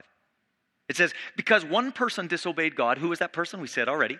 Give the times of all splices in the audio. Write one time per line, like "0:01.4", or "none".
none